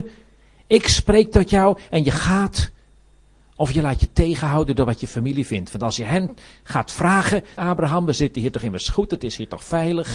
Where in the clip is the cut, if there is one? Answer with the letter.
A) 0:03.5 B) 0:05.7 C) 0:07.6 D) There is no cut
C